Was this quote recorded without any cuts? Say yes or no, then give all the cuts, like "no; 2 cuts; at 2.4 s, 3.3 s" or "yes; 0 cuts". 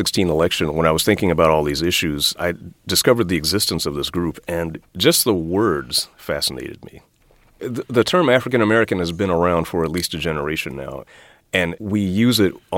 yes; 0 cuts